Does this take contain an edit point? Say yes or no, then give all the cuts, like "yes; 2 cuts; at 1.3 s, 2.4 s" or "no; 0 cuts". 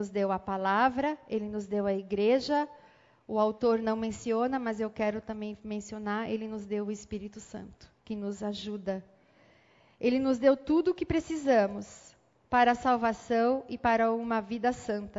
yes; 1 cut; at 8.0 s